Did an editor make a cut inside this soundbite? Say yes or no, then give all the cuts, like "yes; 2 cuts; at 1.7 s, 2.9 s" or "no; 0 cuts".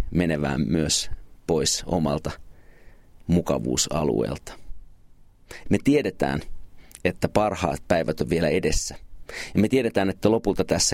yes; 1 cut; at 5.7 s